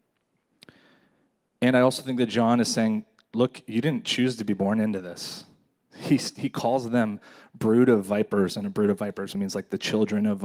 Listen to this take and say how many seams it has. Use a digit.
1